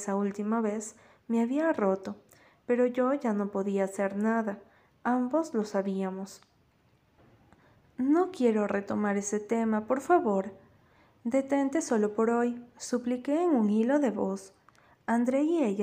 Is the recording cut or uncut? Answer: cut